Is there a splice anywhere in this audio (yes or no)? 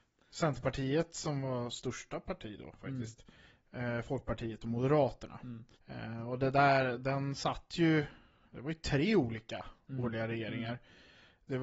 yes